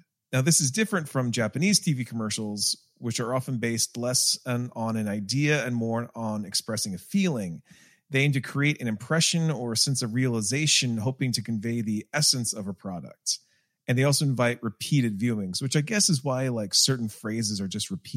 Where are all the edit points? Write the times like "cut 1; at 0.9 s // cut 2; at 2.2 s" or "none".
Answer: none